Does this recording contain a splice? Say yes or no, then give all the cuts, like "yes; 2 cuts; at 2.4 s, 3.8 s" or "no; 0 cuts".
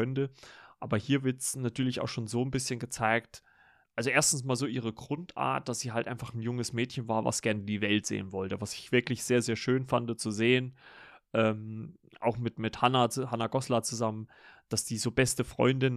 yes; 1 cut; at 3.8 s